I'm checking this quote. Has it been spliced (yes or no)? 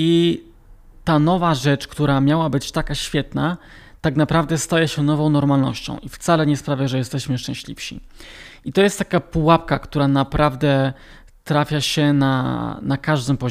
no